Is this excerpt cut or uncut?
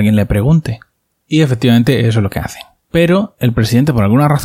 uncut